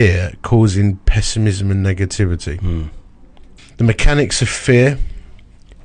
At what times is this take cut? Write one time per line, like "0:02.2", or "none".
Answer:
0:03.6